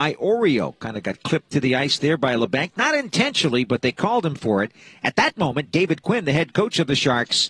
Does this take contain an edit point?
no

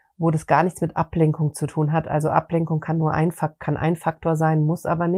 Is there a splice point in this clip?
no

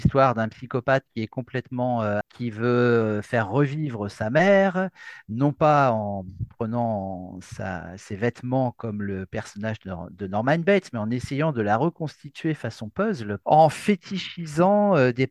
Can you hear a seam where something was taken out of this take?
yes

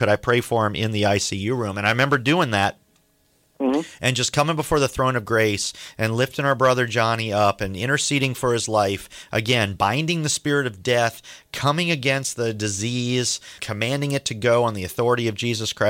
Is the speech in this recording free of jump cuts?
no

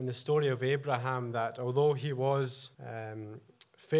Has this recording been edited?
yes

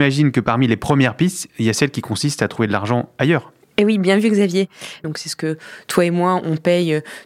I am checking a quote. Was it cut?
yes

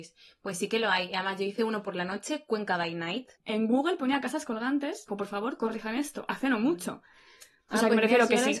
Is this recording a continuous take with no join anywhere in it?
no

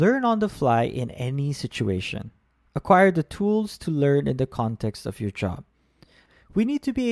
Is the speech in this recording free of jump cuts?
yes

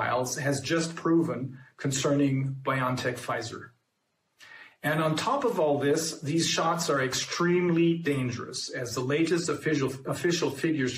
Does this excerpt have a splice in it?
no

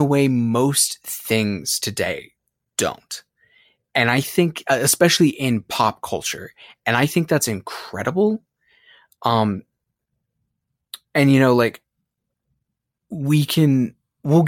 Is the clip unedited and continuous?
yes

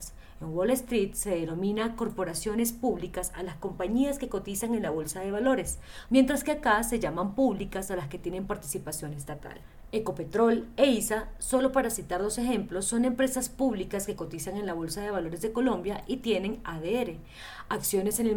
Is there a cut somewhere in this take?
yes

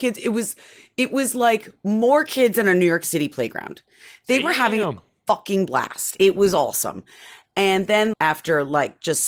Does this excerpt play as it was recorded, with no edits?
no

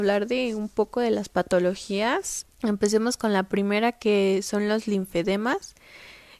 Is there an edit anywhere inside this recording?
yes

